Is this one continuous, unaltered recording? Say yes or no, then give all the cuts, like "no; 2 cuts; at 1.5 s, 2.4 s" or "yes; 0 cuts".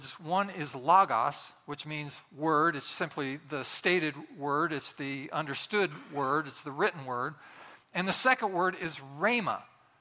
yes; 0 cuts